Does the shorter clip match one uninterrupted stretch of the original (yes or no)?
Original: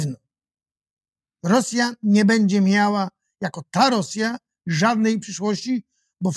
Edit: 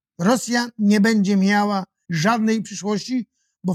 no